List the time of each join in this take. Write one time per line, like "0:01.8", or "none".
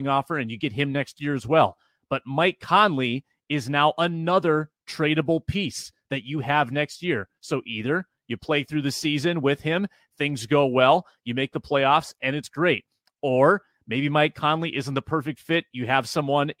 none